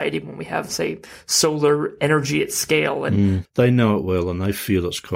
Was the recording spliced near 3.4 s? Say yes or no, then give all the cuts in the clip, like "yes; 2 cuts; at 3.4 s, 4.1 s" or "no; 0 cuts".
yes; 1 cut; at 3.4 s